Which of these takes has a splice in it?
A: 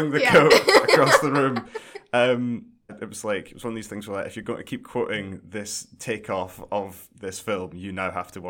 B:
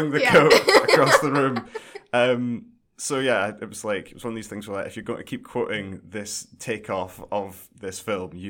A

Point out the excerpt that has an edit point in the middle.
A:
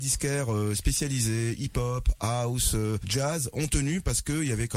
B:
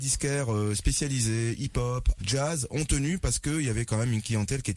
B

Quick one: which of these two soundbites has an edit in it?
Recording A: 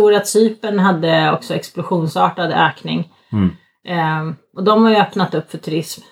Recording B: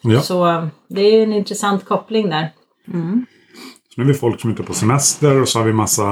B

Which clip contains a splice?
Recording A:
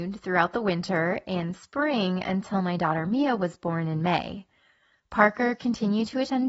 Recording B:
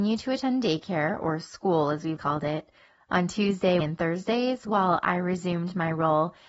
B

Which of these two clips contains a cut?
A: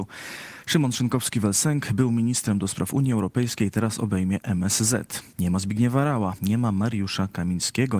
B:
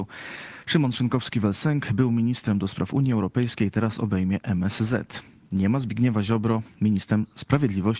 A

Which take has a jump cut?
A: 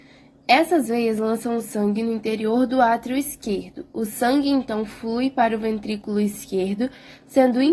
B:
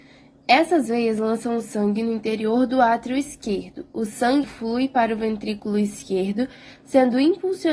B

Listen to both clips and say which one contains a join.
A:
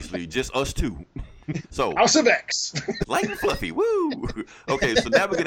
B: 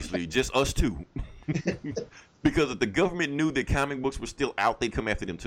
A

